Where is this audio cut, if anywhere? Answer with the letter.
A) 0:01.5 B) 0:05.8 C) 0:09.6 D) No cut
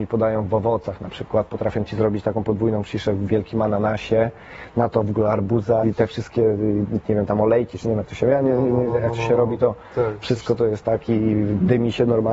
B